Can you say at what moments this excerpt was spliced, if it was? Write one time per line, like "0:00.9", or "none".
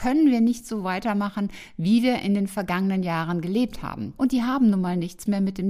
0:04.2

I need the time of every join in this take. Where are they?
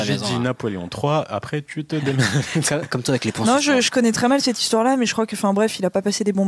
none

